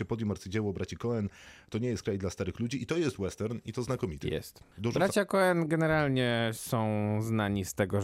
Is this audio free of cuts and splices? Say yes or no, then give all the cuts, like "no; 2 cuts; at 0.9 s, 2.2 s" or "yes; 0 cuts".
yes; 0 cuts